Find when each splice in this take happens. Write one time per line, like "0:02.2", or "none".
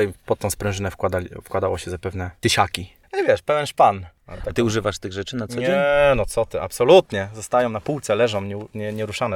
none